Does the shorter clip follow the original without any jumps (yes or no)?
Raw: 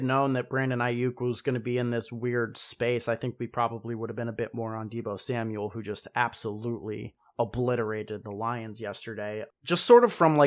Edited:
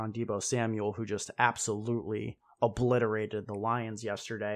yes